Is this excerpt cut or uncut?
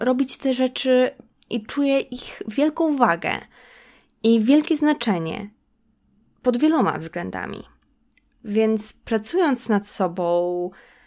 uncut